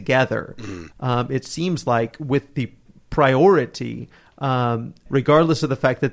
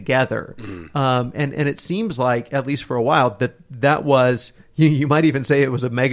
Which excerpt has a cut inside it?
first; 2 cuts; at 0.9 s, 5.1 s

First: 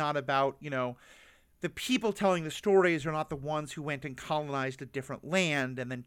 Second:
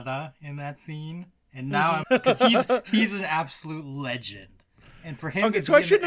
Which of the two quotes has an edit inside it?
second; 1 cut; at 2.0 s

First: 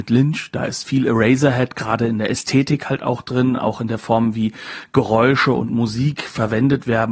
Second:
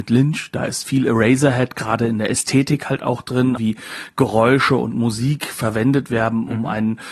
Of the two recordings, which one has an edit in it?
second; 1 cut; at 3.6 s

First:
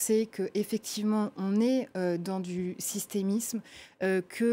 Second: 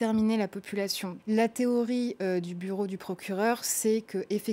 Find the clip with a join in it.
second; 1 cut; at 1.2 s

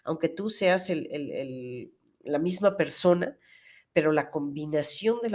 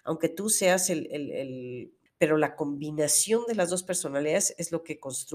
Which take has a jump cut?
second; 1 cut; at 2.1 s

